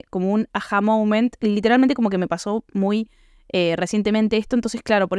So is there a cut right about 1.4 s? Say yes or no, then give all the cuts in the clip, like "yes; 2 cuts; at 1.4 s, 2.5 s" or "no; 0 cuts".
yes; 1 cut; at 1.4 s